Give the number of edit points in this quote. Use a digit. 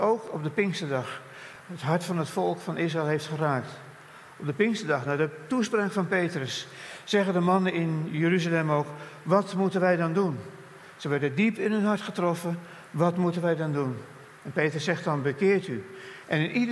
0